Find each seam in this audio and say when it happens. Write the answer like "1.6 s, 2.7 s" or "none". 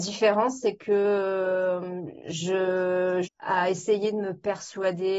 3.3 s